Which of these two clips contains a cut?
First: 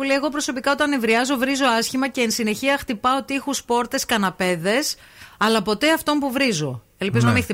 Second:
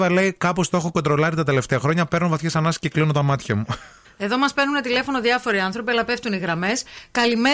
second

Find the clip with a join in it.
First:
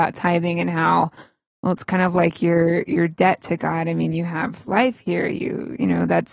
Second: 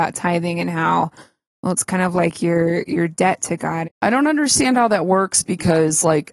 second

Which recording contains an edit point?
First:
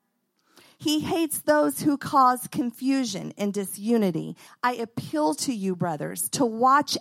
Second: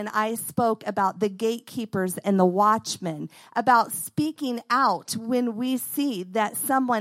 first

